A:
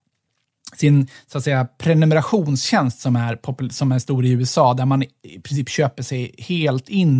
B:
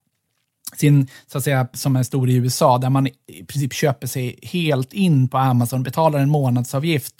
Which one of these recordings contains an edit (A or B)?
B